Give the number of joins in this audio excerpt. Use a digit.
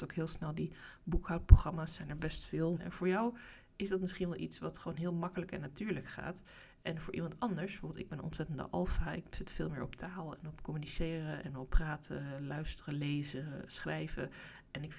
3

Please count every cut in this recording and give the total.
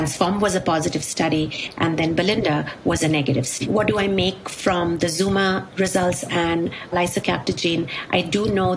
2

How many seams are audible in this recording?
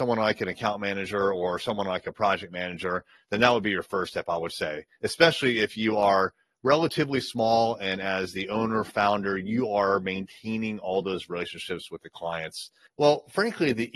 1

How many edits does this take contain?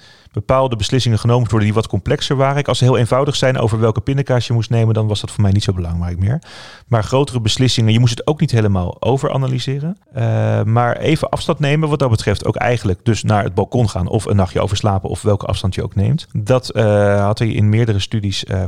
0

